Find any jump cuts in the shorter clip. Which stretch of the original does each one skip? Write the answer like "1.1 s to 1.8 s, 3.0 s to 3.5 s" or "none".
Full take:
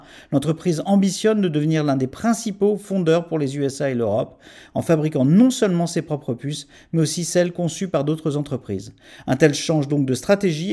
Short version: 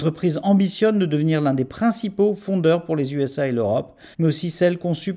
4.5 s to 6.9 s

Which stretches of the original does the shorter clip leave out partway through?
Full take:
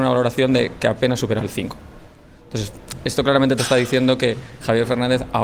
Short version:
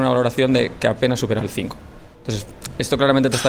2.1 s to 2.4 s

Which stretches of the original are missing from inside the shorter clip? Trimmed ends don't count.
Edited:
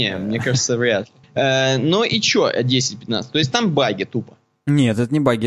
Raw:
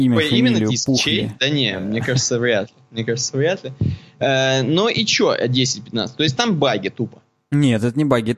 2.9 s to 4.1 s

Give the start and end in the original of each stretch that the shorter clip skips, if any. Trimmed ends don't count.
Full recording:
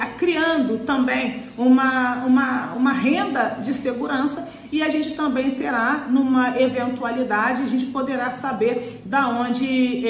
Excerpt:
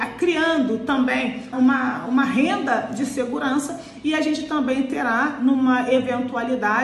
1.5 s to 2.2 s

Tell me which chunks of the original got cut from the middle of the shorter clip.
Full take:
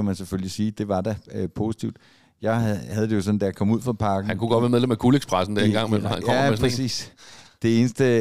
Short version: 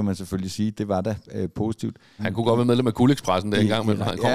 2.2 s to 4.2 s

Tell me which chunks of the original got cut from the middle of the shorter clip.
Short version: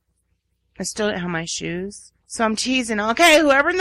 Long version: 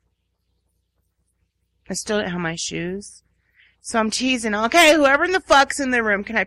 3.3 s to 3.8 s

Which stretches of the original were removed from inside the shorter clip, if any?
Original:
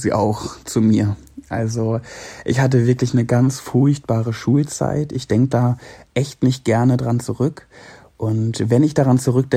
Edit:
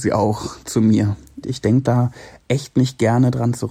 1.4 s to 5.1 s

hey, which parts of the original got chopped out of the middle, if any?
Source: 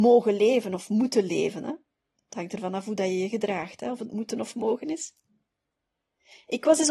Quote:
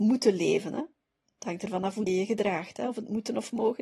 3.0 s to 3.1 s

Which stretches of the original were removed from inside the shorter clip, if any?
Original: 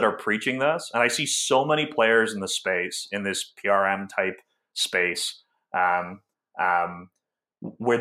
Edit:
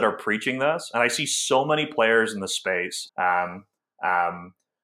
3.1 s to 5.6 s

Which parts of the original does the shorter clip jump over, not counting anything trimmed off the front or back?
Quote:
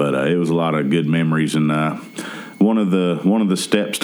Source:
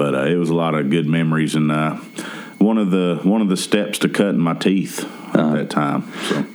none

